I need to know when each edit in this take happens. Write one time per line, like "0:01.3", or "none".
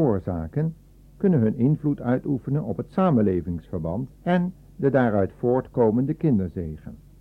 0:04.1